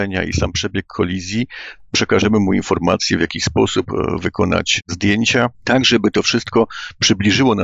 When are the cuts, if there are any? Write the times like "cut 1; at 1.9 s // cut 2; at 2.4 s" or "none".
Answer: cut 1; at 5.5 s

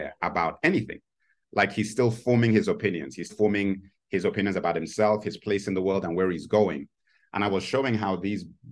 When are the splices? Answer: cut 1; at 3.3 s

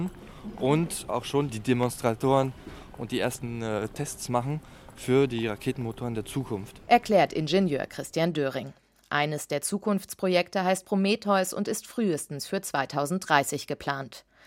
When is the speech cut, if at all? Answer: none

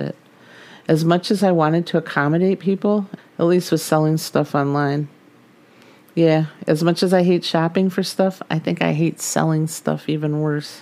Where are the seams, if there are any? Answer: cut 1; at 3.2 s

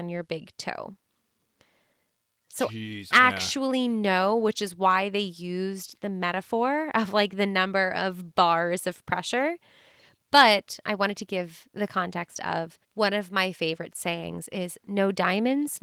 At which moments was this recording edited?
cut 1; at 3.1 s // cut 2; at 10.2 s // cut 3; at 12.8 s

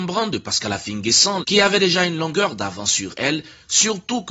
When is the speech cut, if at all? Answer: cut 1; at 1.4 s

